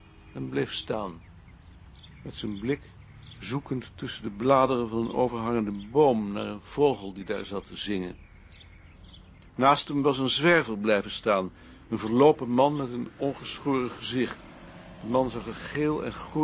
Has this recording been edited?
no; 0 cuts

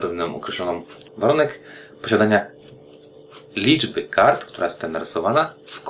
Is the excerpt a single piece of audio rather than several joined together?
no; 1 cut; at 1.1 s

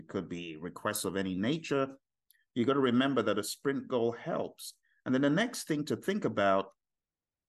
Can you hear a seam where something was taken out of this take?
no; 0 cuts

